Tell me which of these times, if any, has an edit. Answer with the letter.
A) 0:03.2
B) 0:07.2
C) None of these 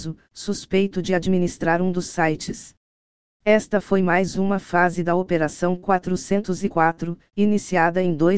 C